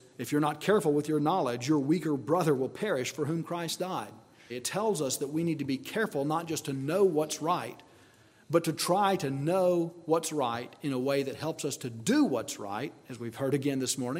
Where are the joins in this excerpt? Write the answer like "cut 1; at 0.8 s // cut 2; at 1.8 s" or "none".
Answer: cut 1; at 4.5 s